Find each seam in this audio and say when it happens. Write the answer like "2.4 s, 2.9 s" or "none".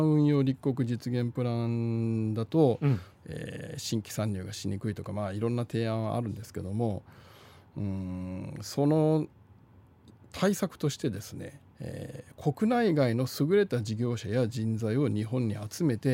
3.1 s, 11.7 s